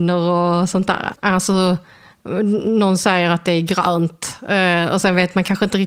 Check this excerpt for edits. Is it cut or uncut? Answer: cut